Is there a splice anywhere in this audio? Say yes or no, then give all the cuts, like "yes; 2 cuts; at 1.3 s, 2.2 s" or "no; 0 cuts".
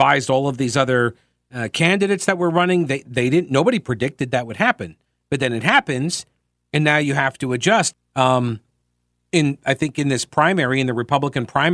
yes; 1 cut; at 7.9 s